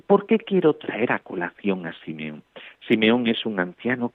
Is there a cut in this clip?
yes; 1 cut; at 2.8 s

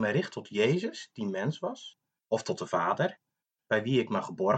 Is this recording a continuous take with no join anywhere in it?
no; 1 cut; at 2.2 s

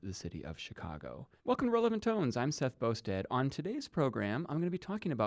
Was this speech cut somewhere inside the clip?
yes; 1 cut; at 1.4 s

